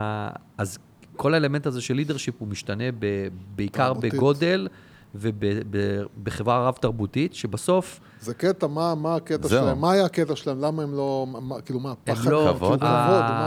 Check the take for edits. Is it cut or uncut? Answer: uncut